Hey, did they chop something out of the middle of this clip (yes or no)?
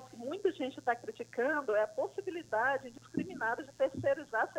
no